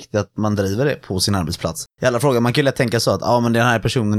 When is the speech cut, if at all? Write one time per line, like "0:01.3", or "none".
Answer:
0:01.9